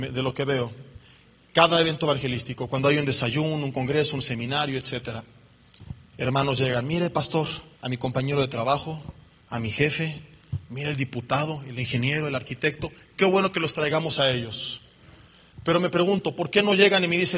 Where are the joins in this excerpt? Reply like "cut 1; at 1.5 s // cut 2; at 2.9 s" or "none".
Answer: cut 1; at 7.7 s